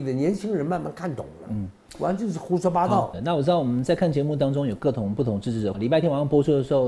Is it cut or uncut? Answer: cut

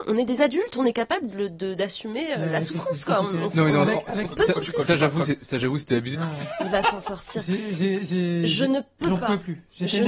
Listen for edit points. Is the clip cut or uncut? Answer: cut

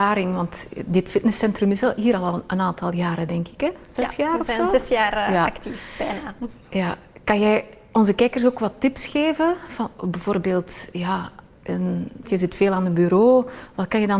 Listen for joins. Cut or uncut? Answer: cut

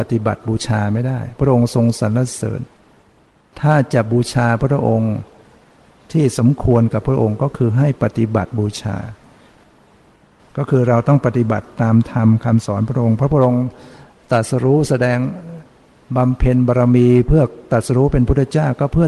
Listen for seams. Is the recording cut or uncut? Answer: cut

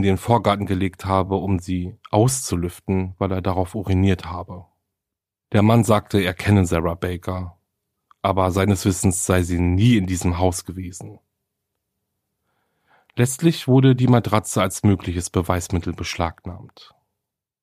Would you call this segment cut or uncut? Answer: uncut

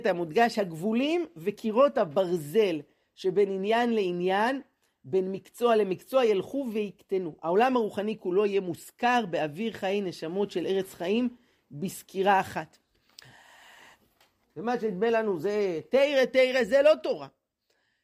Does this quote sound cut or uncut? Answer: cut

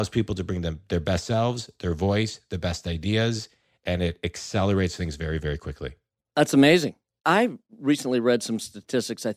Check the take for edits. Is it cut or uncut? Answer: uncut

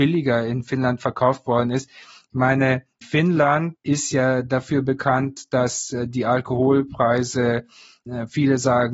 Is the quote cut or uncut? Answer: uncut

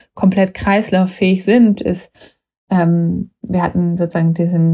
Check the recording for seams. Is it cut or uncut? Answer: uncut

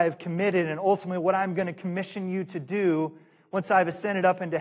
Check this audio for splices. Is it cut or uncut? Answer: uncut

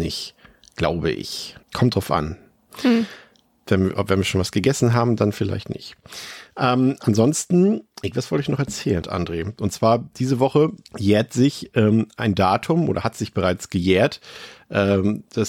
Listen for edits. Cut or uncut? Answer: cut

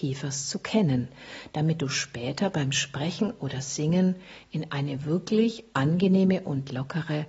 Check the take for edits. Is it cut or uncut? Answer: uncut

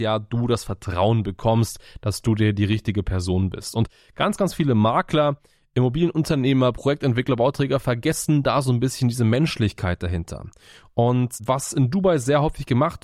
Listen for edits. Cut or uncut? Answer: uncut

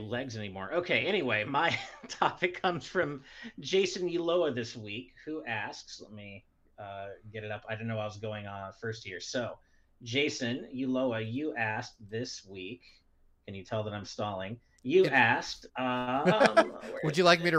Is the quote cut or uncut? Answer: uncut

